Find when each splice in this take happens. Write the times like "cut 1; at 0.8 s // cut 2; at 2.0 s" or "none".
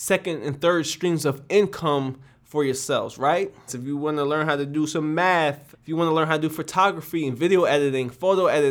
cut 1; at 3.7 s // cut 2; at 5.7 s